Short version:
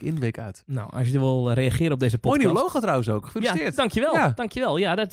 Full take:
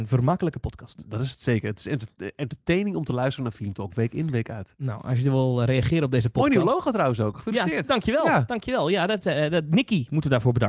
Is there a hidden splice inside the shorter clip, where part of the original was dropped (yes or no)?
no